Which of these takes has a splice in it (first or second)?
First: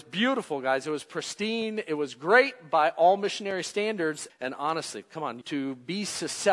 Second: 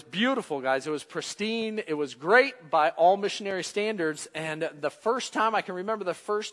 first